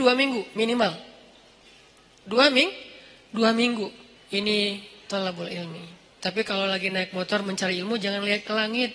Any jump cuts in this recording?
yes; 2 cuts; at 4.2 s, 6.2 s

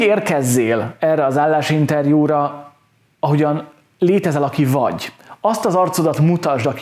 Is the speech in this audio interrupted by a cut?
no; 0 cuts

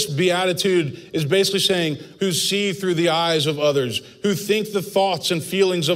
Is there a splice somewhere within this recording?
yes; 1 cut; at 2.2 s

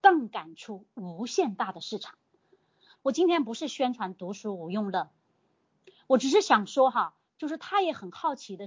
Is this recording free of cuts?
no; 1 cut; at 2.9 s

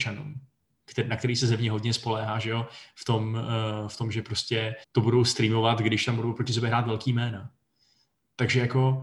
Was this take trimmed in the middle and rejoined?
yes; 1 cut; at 4.8 s

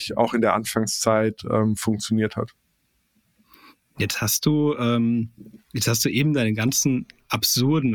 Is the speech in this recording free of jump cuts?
yes; 0 cuts

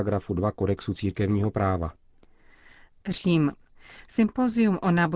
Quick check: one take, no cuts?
yes; 0 cuts

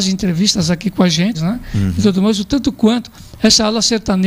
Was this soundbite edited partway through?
yes; 1 cut; at 1.3 s

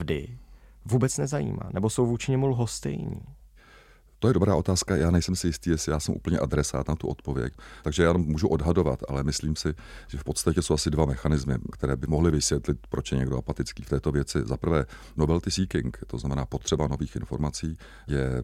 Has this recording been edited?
no; 0 cuts

